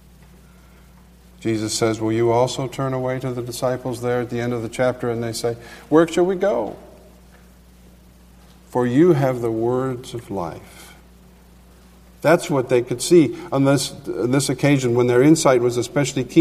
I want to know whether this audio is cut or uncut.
uncut